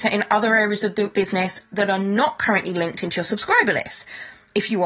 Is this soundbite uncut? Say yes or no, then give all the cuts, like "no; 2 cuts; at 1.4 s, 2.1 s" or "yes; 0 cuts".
yes; 0 cuts